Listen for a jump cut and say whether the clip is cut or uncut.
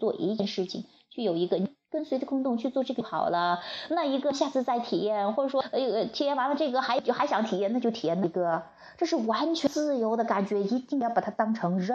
uncut